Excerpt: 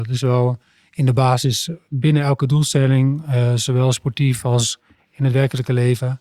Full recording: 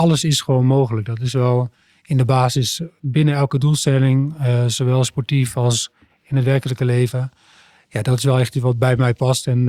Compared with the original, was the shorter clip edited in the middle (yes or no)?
no